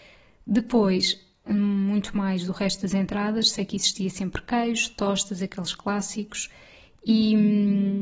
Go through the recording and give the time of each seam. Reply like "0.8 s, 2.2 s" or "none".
1.5 s